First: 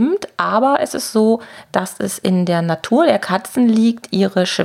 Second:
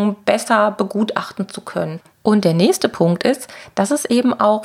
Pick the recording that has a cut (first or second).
second